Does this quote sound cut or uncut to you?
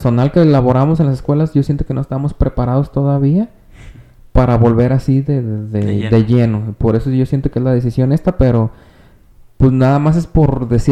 uncut